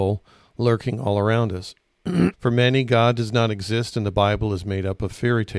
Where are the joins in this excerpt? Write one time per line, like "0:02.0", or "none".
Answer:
0:02.3